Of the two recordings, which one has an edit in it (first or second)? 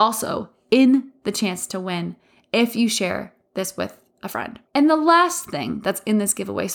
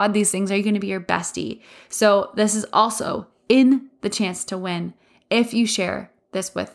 first